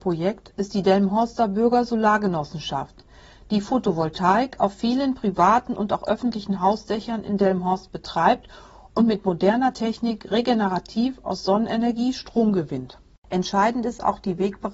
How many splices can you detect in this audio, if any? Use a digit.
0